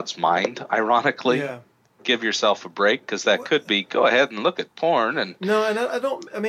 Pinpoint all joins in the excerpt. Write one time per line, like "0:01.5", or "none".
0:02.0